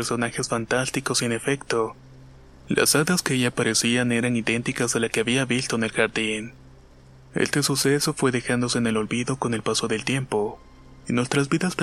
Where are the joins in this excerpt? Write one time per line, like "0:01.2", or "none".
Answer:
none